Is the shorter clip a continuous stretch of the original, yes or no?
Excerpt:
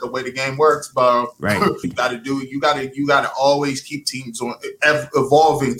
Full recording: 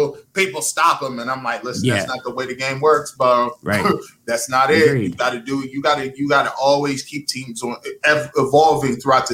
no